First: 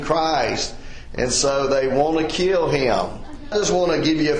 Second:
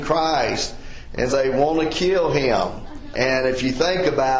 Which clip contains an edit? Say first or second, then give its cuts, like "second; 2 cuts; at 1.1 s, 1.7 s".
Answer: second; 2 cuts; at 1.3 s, 3.1 s